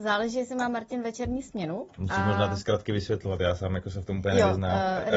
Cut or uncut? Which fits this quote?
cut